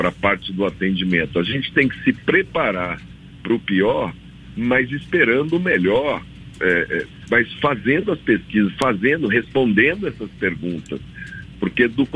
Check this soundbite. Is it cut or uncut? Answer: uncut